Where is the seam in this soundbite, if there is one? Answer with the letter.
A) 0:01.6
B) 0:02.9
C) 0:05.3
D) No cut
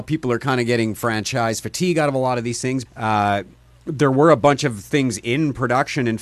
B